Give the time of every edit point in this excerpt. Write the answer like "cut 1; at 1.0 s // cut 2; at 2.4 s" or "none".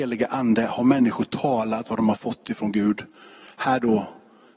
none